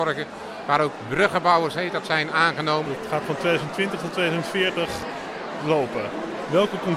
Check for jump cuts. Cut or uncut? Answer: cut